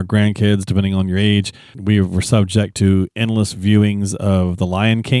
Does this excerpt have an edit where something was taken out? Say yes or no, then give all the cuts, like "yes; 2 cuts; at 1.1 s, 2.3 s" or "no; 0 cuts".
yes; 1 cut; at 1.7 s